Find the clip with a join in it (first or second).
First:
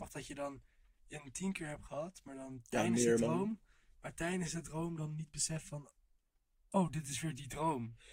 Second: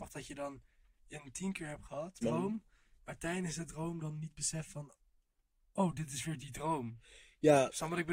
second